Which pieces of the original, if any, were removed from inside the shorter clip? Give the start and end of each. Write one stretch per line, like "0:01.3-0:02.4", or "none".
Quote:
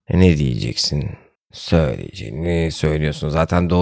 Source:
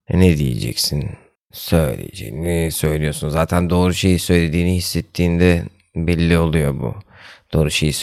none